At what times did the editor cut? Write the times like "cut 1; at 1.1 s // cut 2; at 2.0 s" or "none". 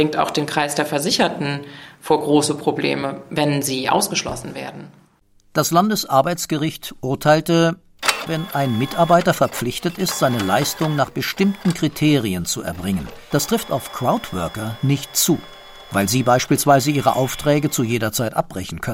cut 1; at 8.3 s // cut 2; at 13.3 s